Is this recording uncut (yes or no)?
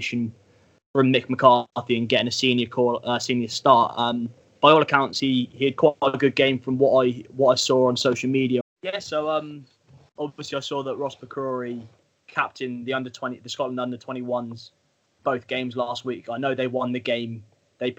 no